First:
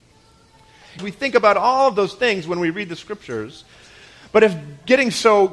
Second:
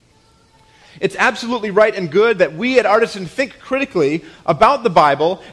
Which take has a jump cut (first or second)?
first